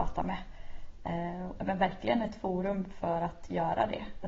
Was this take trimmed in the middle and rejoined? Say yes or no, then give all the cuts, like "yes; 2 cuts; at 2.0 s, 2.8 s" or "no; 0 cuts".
yes; 1 cut; at 1.6 s